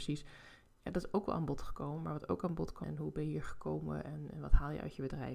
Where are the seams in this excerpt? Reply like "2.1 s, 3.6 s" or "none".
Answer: 2.8 s